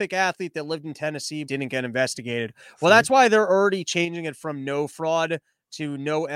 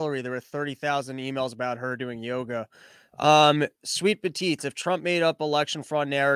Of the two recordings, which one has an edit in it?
first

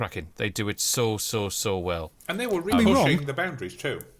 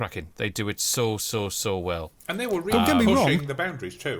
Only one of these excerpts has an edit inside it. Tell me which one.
first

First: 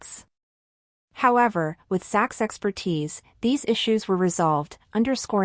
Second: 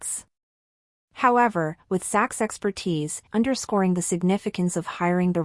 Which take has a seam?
second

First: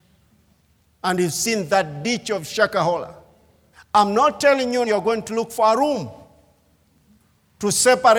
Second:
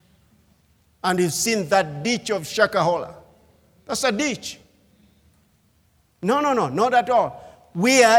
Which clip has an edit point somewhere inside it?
first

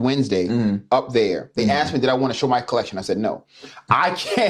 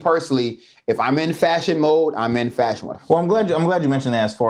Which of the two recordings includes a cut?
second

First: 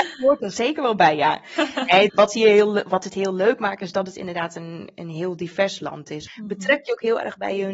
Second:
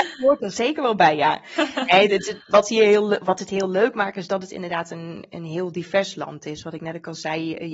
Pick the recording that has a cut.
first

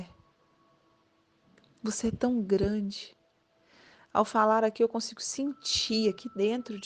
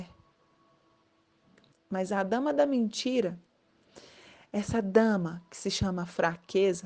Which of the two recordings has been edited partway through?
second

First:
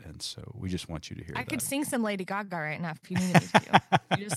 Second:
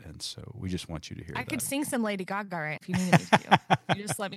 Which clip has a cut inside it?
second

